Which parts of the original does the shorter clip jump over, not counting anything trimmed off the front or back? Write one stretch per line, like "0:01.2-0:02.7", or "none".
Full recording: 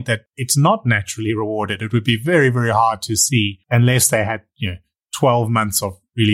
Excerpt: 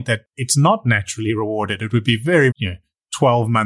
0:02.5-0:04.5